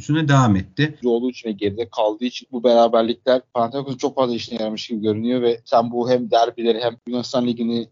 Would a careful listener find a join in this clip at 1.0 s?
yes; 1 cut; at 1.0 s

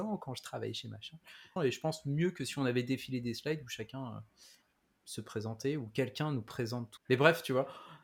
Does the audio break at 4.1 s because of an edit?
no; 2 cuts; at 1.6 s, 7.0 s

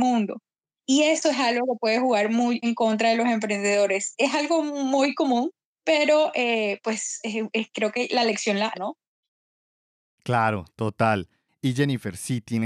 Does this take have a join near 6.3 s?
no; 2 cuts; at 2.6 s, 8.7 s

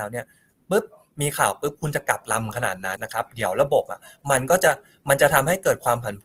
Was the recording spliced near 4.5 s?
no; 1 cut; at 3.0 s

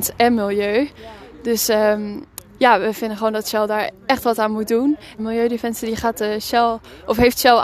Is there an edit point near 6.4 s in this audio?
no; 2 cuts; at 2.6 s, 5.2 s

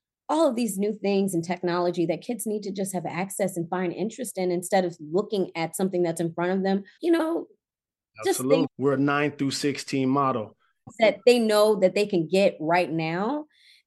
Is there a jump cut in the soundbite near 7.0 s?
yes; 3 cuts; at 7.0 s, 8.7 s, 10.9 s

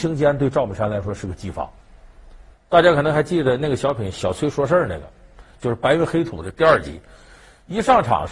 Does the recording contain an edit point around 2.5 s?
yes; 1 cut; at 2.5 s

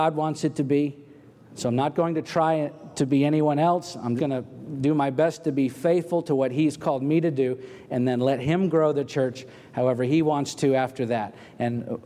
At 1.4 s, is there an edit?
no; 1 cut; at 4.2 s

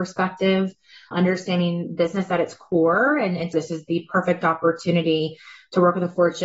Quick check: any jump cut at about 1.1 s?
yes; 2 cuts; at 1.1 s, 3.5 s

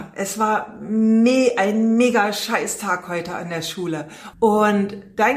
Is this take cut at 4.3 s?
yes; 1 cut; at 4.3 s

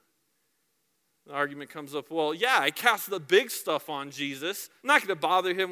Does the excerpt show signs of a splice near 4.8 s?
yes; 1 cut; at 4.8 s

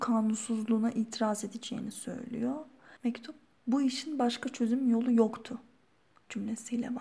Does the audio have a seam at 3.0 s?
yes; 1 cut; at 3.0 s

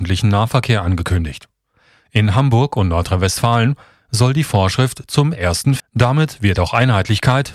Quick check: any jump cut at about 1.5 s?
no; 1 cut; at 5.8 s

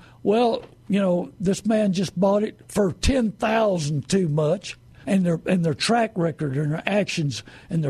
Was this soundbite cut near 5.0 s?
yes; 1 cut; at 5.0 s

